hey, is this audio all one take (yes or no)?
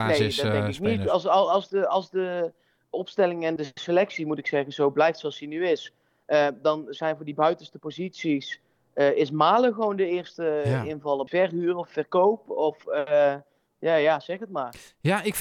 no